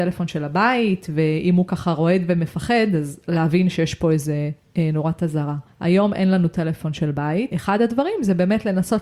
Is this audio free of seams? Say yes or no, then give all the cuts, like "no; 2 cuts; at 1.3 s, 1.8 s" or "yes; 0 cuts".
yes; 0 cuts